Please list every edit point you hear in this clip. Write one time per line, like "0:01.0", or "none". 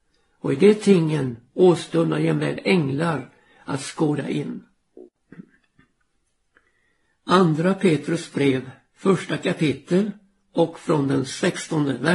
none